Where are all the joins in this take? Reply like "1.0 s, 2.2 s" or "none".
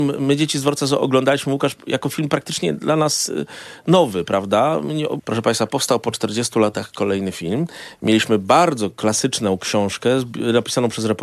5.2 s

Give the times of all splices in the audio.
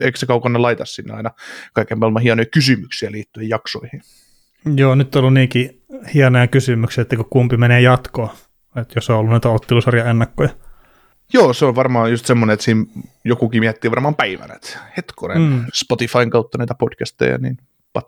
15.7 s

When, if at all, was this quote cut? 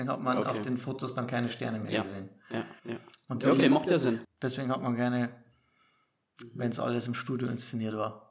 2.8 s, 4.2 s

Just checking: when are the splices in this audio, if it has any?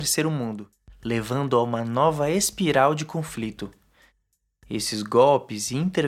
none

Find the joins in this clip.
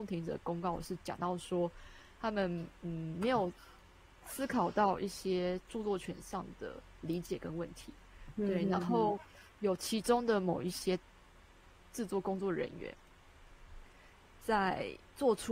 none

